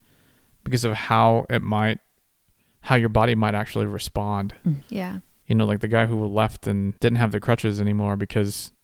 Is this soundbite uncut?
no; 2 cuts; at 4.8 s, 7.0 s

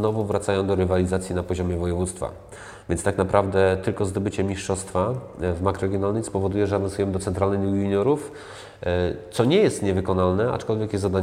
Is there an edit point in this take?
no; 0 cuts

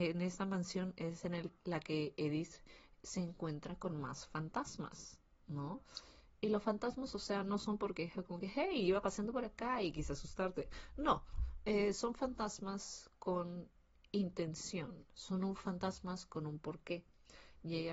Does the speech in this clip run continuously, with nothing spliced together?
yes; 0 cuts

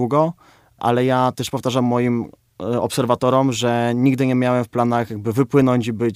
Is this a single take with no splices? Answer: yes; 0 cuts

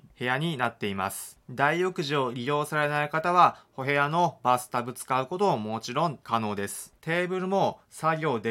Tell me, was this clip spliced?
yes; 1 cut; at 7.0 s

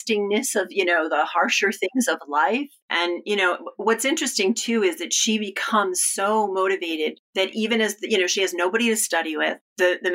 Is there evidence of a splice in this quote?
no; 0 cuts

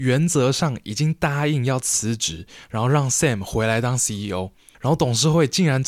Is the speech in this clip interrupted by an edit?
yes; 1 cut; at 4.7 s

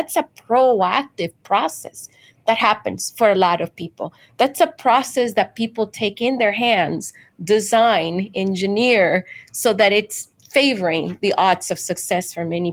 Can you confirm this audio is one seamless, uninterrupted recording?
yes; 0 cuts

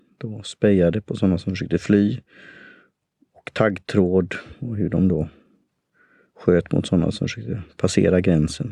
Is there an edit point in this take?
no; 0 cuts

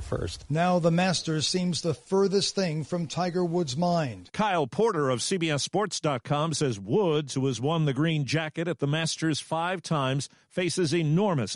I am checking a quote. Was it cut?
no; 0 cuts

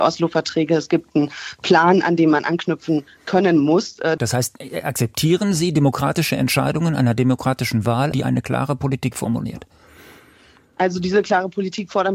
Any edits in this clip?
yes; 2 cuts; at 4.2 s, 8.1 s

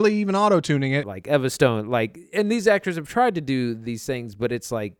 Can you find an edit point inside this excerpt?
yes; 1 cut; at 1.0 s

